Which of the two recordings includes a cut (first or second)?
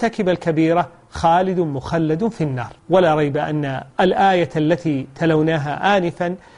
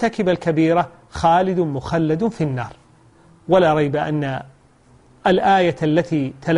first